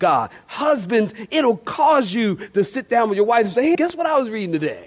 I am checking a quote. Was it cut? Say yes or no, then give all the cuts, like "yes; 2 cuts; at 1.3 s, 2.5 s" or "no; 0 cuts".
yes; 1 cut; at 3.7 s